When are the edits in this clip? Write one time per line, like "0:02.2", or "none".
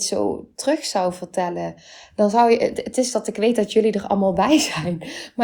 none

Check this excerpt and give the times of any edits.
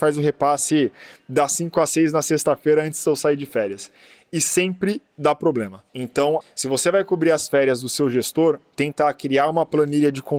0:06.4
0:08.7

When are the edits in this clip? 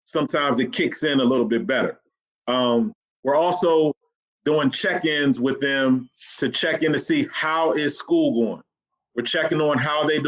none

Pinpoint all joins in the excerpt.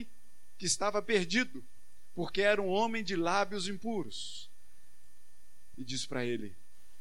0:05.7

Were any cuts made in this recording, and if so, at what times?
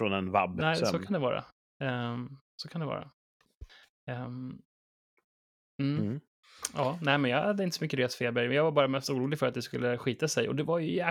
none

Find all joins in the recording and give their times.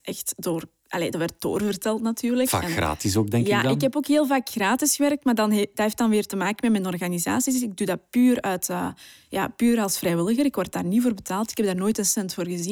none

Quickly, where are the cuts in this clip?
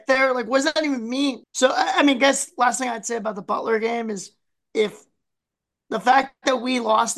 0:01.4
0:04.7

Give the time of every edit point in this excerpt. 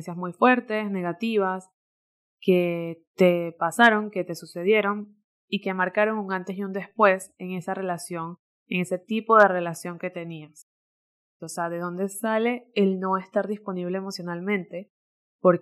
0:03.1
0:11.4

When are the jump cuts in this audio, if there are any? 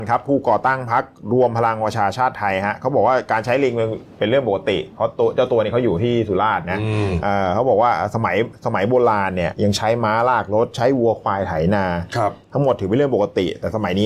0:09.5

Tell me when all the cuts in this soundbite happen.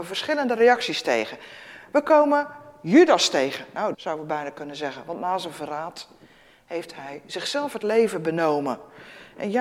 0:03.9

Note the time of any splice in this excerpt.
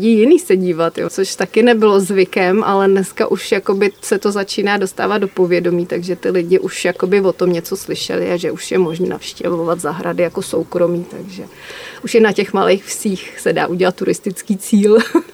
0:01.1

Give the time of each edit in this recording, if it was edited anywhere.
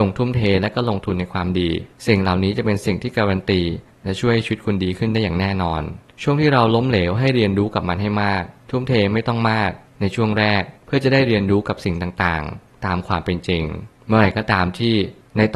none

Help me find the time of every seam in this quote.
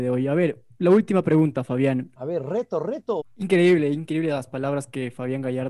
0:02.1
0:03.2

